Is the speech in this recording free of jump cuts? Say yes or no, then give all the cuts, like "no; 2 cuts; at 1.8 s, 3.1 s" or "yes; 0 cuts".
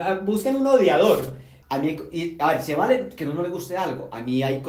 no; 1 cut; at 1.6 s